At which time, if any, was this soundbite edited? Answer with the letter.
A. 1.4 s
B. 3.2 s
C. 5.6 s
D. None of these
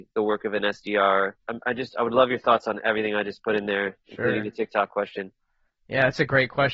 A